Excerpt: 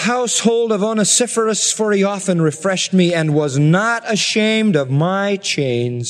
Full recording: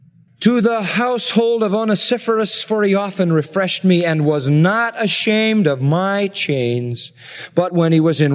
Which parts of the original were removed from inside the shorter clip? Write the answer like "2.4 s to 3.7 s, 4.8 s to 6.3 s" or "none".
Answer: none